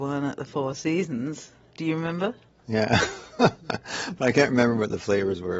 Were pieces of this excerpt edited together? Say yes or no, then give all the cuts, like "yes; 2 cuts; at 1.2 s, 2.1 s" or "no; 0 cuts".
yes; 1 cut; at 2.6 s